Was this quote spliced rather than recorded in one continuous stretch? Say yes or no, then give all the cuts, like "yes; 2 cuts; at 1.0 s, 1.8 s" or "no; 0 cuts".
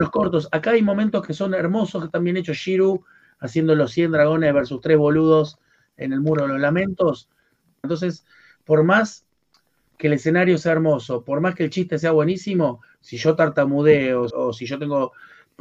yes; 2 cuts; at 7.8 s, 14.3 s